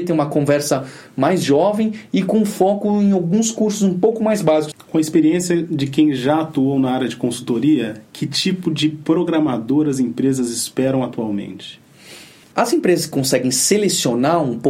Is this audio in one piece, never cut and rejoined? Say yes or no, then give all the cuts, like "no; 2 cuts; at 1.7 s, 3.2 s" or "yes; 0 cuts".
no; 1 cut; at 4.7 s